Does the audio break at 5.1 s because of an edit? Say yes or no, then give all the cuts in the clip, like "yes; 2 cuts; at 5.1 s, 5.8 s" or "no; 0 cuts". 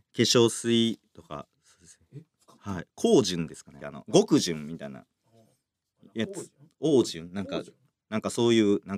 no; 1 cut; at 3.8 s